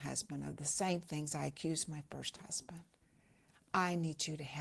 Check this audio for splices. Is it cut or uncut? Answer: uncut